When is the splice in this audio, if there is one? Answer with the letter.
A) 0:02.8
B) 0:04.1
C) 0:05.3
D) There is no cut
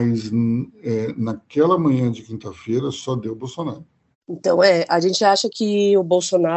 B